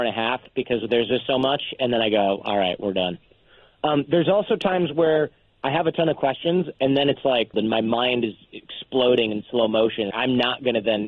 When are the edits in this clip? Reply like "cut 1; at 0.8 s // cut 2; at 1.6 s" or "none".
cut 1; at 7.5 s // cut 2; at 10.1 s